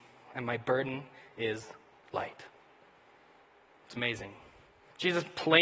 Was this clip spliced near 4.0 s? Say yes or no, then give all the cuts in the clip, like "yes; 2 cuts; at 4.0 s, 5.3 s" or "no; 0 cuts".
yes; 1 cut; at 4.0 s